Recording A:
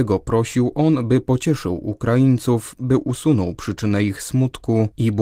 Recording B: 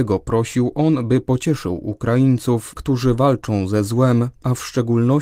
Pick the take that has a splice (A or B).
B